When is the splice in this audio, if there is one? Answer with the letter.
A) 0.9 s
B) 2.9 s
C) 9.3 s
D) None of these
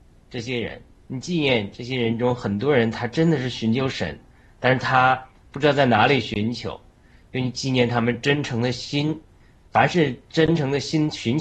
D